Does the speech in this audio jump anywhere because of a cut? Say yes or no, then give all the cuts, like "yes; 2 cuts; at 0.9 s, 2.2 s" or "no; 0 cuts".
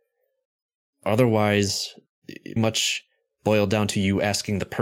yes; 2 cuts; at 0.9 s, 2.6 s